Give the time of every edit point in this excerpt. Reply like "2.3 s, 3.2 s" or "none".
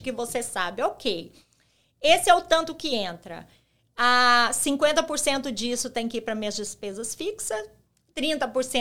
none